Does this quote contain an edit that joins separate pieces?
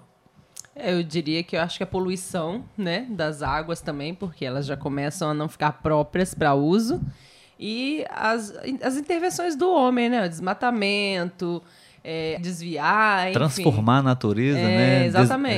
yes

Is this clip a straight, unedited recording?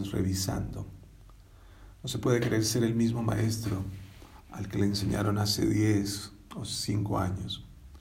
yes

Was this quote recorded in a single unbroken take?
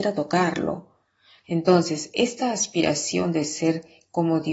no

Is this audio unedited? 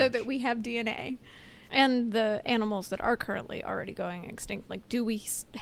no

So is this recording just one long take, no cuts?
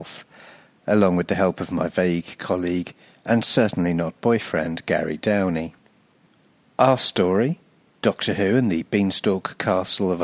yes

